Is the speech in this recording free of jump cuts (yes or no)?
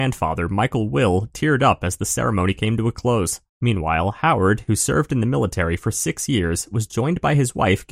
no